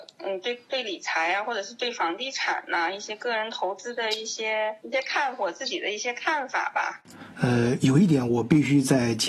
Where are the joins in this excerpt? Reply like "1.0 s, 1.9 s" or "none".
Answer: 4.8 s, 7.3 s